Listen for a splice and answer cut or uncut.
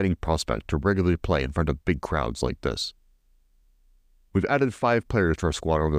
uncut